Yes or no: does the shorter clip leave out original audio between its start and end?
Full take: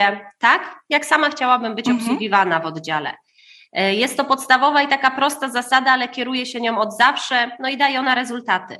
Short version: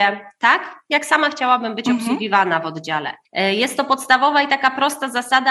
yes